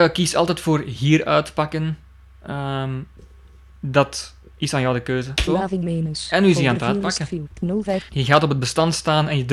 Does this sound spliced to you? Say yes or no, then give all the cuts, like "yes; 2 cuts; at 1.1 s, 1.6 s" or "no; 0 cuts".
yes; 2 cuts; at 5.5 s, 8.1 s